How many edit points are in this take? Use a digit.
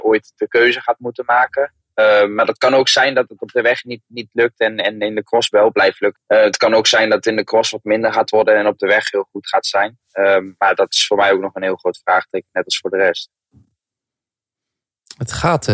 1